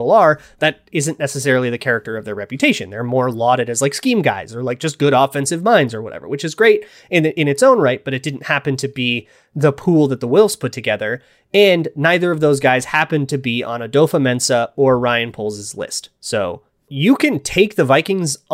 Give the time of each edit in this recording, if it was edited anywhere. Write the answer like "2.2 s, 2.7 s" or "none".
none